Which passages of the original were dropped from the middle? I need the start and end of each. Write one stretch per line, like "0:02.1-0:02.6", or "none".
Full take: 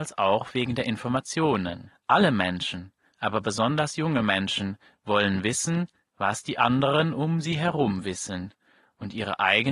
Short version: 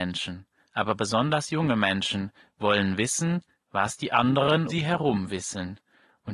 0:07.1-0:07.4

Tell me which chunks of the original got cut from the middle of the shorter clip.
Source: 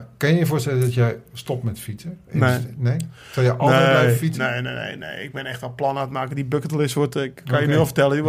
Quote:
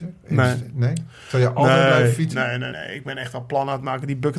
0:04.7-0:05.0

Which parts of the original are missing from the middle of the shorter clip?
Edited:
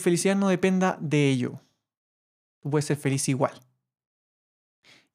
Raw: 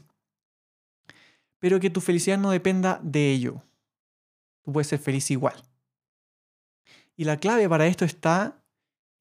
none

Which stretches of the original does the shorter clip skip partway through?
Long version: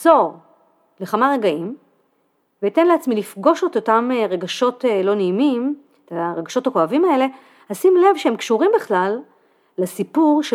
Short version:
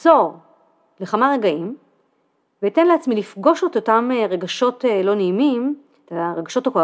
none

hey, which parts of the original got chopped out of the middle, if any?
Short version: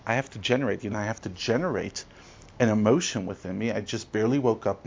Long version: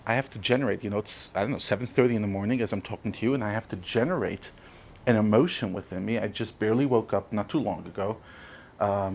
0:00.9-0:03.4

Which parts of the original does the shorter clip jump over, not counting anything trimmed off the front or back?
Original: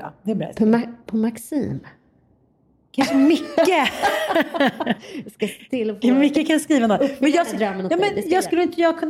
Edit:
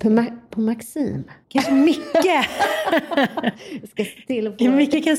0:02.0-0:02.8

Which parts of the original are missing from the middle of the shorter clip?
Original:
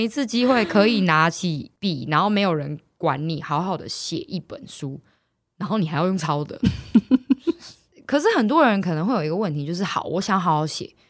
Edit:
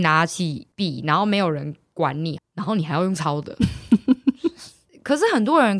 0:03.4-0:05.4

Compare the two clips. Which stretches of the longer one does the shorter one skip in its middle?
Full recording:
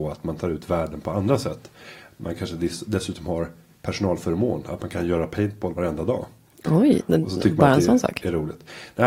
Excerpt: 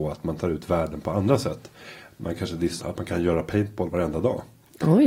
0:02.8-0:04.6

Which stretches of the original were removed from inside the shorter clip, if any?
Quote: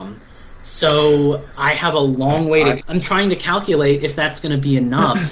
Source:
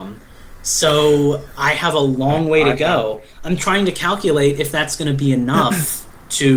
0:02.8-0:03.3

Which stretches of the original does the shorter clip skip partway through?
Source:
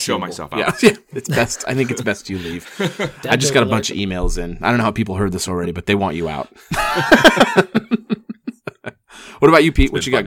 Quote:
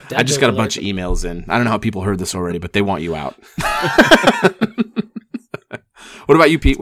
none

